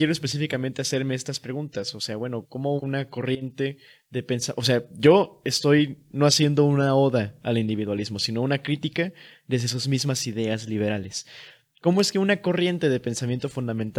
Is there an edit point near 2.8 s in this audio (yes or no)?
yes